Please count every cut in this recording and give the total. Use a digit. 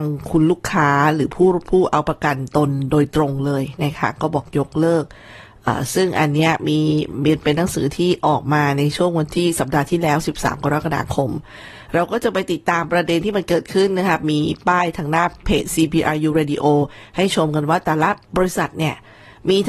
1